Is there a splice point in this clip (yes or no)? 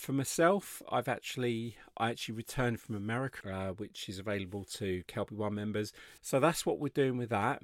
yes